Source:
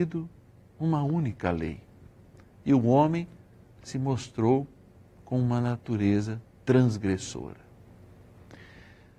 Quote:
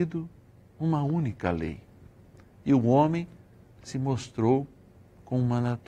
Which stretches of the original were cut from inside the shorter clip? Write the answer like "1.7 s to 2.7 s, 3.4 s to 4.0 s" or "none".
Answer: none